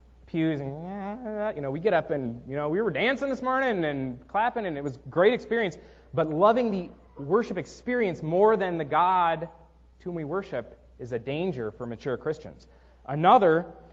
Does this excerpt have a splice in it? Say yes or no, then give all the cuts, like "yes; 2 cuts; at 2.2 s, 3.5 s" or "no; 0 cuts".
no; 0 cuts